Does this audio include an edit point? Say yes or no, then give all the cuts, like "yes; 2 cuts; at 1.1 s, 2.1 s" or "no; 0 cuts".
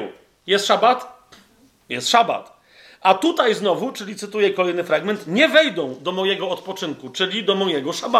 no; 0 cuts